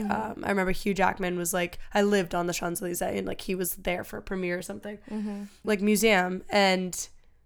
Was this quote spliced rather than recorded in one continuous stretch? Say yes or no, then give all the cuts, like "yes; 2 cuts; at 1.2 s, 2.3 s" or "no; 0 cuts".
yes; 1 cut; at 5.6 s